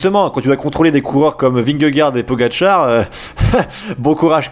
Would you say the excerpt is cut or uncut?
uncut